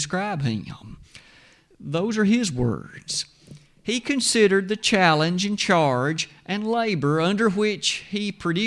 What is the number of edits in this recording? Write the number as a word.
one